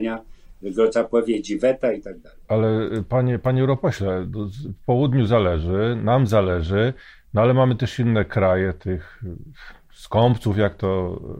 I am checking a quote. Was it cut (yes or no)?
yes